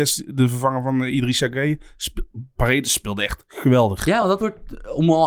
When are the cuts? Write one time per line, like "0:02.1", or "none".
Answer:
none